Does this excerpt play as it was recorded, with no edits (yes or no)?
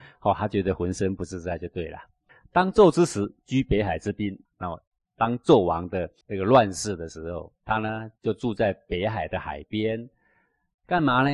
no